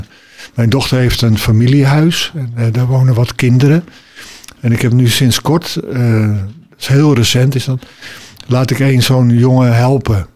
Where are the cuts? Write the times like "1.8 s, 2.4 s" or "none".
none